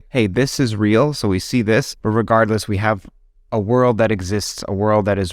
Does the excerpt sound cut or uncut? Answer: uncut